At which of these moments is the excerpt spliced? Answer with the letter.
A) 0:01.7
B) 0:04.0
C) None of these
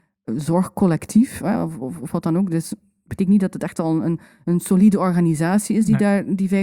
C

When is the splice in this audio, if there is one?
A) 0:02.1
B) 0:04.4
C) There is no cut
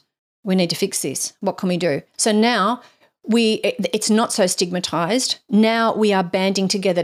A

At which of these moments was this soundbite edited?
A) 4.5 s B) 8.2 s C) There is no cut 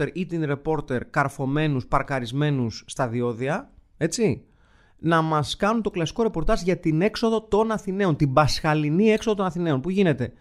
C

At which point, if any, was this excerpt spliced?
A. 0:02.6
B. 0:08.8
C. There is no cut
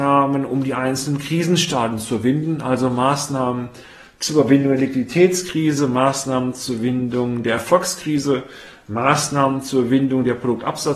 C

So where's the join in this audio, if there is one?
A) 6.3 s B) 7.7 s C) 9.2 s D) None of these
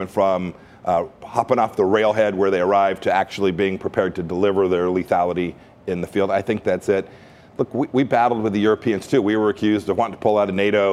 D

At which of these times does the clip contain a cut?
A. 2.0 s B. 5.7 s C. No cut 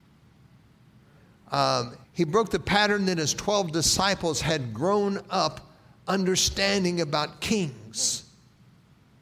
A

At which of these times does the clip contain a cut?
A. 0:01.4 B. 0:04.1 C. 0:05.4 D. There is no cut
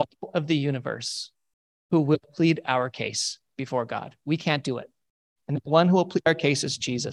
C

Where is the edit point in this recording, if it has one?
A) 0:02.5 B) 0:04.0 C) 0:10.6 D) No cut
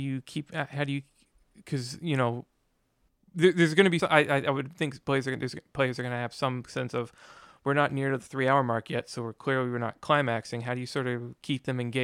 B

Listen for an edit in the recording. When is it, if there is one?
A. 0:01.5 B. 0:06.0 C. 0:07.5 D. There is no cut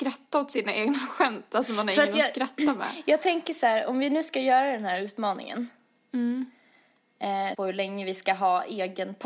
C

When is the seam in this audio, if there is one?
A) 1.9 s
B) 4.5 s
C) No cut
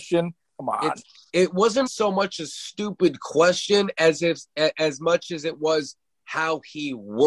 A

